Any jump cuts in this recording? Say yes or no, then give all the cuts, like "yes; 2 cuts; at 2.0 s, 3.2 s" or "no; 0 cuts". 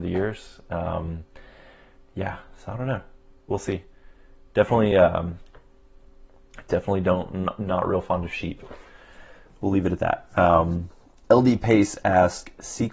no; 0 cuts